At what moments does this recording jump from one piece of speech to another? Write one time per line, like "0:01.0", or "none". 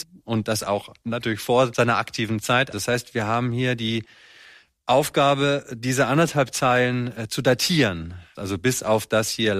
0:02.7
0:08.3